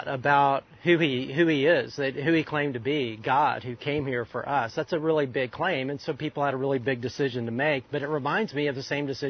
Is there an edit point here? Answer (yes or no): no